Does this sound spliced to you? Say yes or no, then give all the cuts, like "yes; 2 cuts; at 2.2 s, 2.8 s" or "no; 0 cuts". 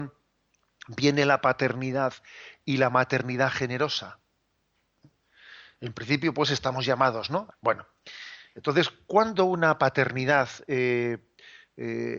yes; 1 cut; at 7.5 s